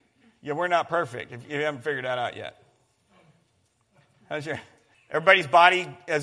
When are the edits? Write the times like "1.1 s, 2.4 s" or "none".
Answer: 4.9 s